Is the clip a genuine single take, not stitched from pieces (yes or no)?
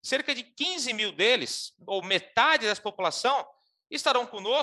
yes